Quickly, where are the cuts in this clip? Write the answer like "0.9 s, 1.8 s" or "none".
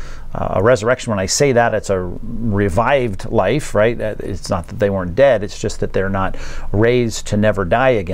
none